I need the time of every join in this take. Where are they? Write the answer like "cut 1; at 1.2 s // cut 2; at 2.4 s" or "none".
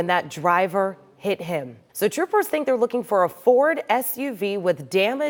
cut 1; at 1.9 s